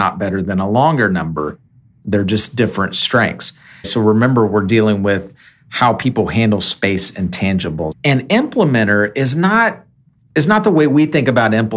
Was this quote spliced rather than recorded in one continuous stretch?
yes; 2 cuts; at 3.8 s, 7.9 s

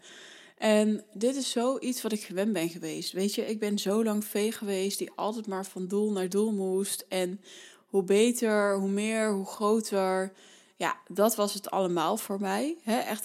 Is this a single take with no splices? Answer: yes; 0 cuts

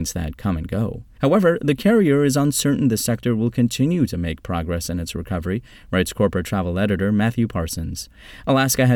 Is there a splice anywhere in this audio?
yes; 1 cut; at 1.2 s

